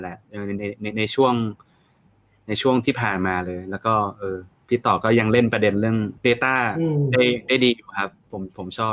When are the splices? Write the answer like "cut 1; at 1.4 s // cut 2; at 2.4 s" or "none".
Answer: cut 1; at 6.2 s